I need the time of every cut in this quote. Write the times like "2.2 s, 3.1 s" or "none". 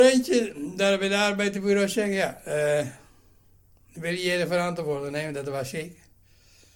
none